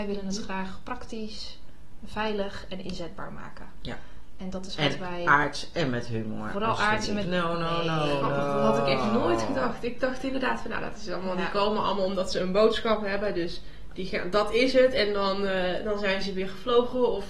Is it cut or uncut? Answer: cut